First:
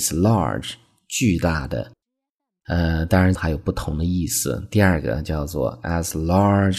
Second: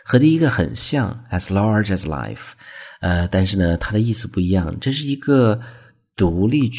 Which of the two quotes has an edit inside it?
first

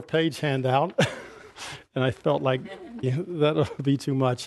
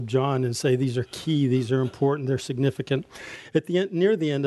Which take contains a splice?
first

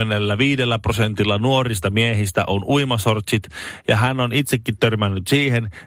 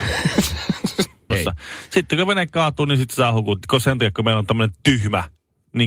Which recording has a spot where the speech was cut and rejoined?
second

